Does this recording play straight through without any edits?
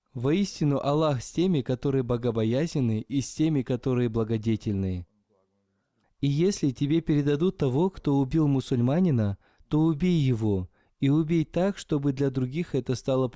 no; 1 cut; at 6.0 s

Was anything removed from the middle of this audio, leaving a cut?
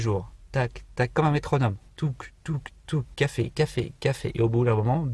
yes; 2 cuts; at 0.9 s, 3.5 s

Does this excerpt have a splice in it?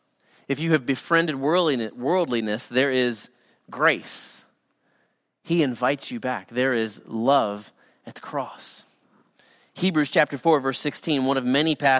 no; 0 cuts

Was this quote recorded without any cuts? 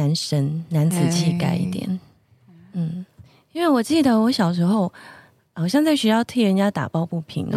yes; 0 cuts

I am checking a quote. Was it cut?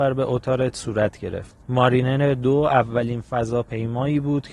yes; 1 cut; at 1.6 s

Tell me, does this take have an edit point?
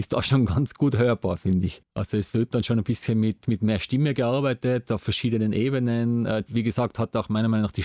yes; 2 cuts; at 1.8 s, 6.5 s

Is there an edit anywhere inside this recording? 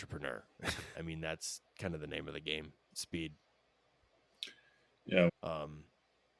yes; 2 cuts; at 0.9 s, 5.3 s

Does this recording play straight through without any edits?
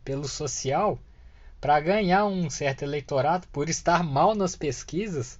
no; 1 cut; at 3.5 s

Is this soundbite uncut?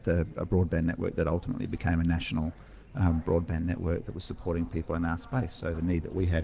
yes; 0 cuts

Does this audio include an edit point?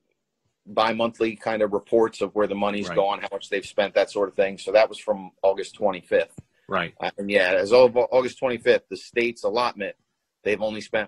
no; 0 cuts

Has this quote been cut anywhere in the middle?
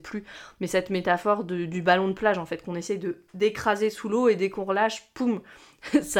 no; 0 cuts

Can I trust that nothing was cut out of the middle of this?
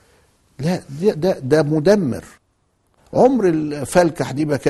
yes; 0 cuts

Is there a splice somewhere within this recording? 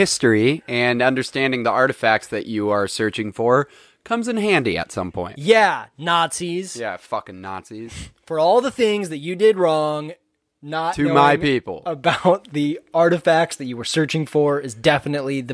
no; 0 cuts

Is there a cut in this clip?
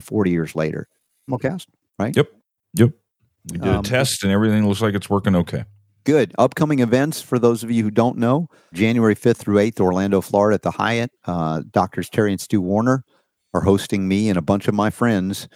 yes; 2 cuts; at 1.3 s, 8.7 s

